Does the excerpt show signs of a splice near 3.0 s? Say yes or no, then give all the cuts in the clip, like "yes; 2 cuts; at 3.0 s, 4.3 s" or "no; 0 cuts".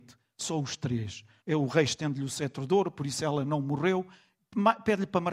no; 1 cut; at 1.4 s